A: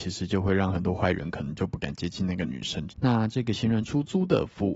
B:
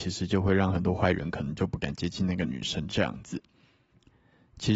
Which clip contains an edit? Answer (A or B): A